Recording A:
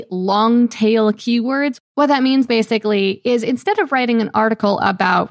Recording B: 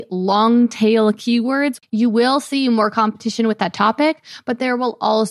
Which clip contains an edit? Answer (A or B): B